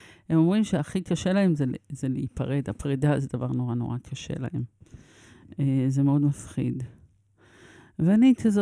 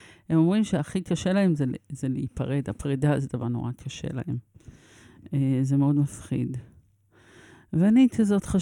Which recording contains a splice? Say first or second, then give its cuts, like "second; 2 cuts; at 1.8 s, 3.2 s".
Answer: second; 1 cut; at 3.4 s